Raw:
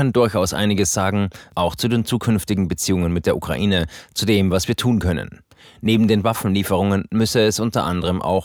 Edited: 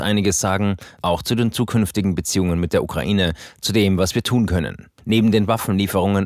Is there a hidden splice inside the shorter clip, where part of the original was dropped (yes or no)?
yes